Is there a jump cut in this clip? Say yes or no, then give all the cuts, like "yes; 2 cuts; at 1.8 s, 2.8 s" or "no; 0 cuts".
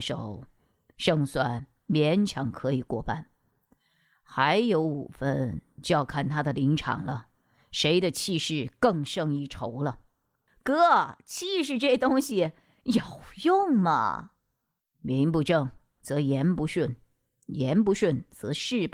no; 0 cuts